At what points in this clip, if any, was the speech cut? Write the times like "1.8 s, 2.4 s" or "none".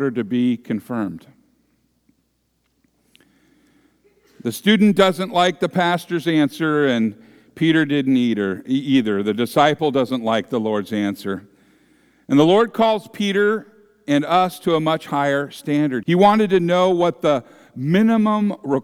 16.0 s